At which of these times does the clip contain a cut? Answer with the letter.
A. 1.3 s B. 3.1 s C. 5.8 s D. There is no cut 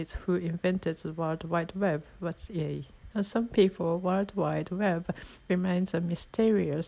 B